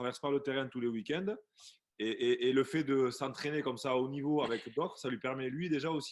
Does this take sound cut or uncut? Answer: uncut